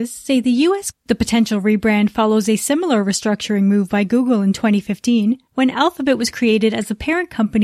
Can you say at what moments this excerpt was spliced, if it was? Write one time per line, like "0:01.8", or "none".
0:00.9